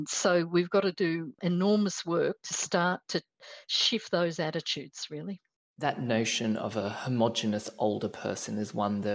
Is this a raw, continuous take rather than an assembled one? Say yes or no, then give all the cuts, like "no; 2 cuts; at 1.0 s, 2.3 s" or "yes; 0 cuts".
yes; 0 cuts